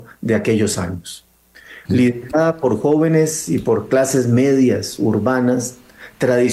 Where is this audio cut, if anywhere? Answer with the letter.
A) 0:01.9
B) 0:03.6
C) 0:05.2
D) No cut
A